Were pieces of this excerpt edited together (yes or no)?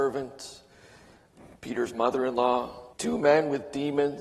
yes